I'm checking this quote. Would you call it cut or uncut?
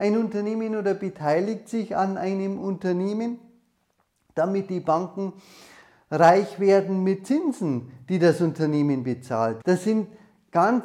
cut